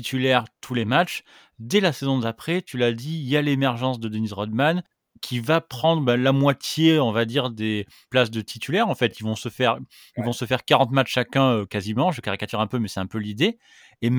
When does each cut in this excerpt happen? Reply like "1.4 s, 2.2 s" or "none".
none